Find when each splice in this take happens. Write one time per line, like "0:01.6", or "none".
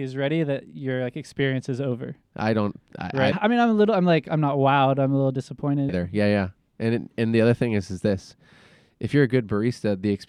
0:03.3
0:05.9